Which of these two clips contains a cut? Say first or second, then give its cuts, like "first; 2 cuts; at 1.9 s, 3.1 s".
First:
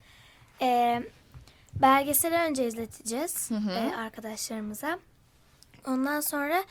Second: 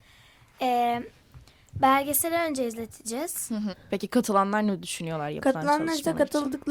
second; 1 cut; at 3.7 s